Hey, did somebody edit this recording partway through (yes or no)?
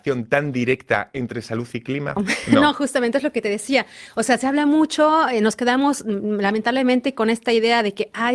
yes